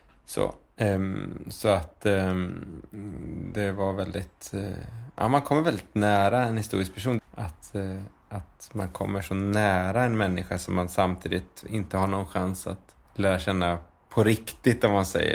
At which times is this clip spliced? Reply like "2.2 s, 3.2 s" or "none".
3.5 s, 7.2 s, 13.0 s

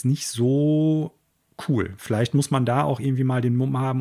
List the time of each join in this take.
none

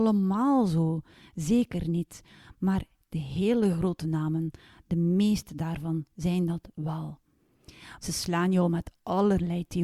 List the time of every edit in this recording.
8.0 s

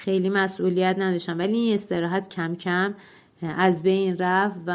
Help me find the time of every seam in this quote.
none

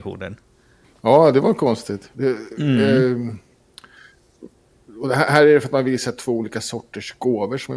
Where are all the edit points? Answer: 2.1 s

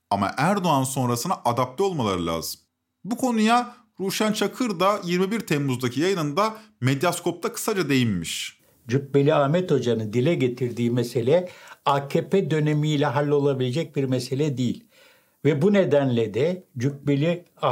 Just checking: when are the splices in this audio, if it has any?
none

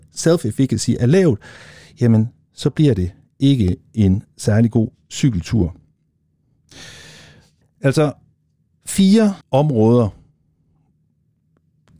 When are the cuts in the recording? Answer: 7.6 s, 9.4 s

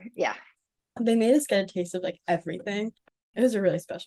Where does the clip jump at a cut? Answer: none

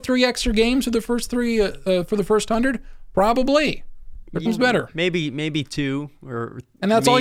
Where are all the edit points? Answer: 4.5 s

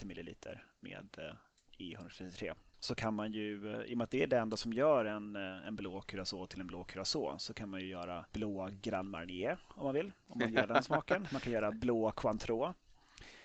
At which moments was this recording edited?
none

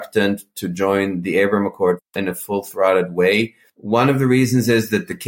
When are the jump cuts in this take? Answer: none

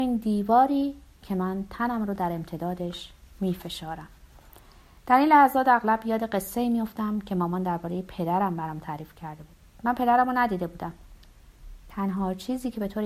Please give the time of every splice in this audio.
none

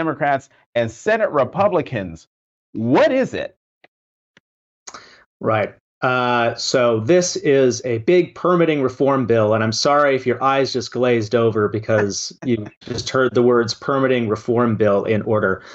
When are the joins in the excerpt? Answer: none

